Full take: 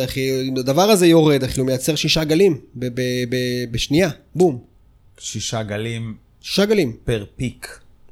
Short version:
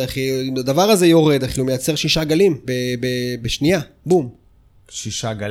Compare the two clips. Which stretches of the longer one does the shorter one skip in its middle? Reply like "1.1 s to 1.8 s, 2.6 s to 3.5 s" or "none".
2.6 s to 2.9 s